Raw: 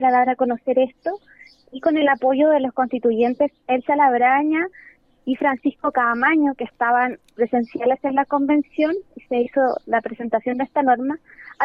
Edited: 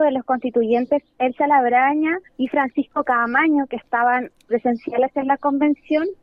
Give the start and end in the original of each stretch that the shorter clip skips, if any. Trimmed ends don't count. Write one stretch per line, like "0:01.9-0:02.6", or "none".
0:04.7-0:05.1